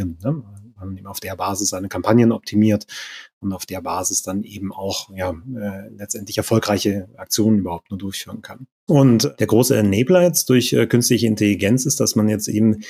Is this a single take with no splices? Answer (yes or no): no